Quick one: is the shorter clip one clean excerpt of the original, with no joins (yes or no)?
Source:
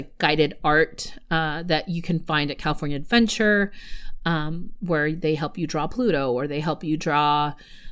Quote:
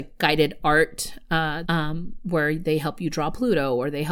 no